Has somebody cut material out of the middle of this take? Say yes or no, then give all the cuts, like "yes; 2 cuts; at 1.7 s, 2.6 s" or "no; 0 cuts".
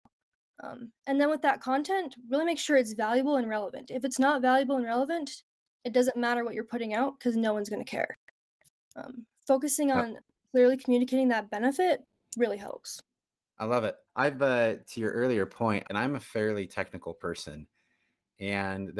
yes; 2 cuts; at 14.1 s, 15.8 s